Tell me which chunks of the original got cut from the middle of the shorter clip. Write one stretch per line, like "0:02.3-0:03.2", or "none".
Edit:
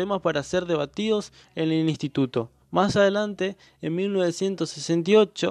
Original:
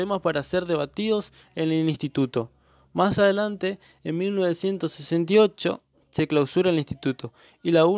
0:02.6-0:02.8